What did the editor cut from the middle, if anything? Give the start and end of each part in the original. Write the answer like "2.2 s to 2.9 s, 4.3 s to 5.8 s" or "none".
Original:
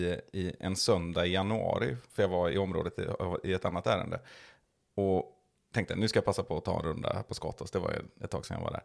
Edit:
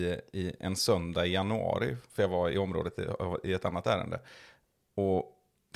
none